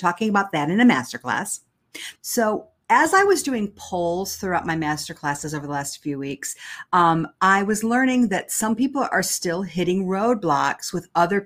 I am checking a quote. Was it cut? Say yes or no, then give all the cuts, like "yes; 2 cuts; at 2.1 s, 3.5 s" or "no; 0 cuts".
yes; 1 cut; at 2.2 s